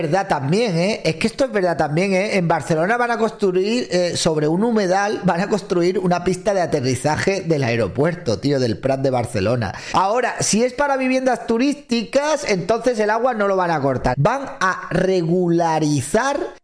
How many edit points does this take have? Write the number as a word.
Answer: two